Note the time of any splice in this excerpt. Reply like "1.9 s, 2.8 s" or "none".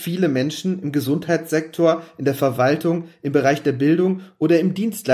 none